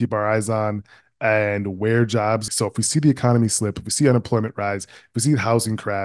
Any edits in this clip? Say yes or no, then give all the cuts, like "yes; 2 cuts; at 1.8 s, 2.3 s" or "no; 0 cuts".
yes; 1 cut; at 2.5 s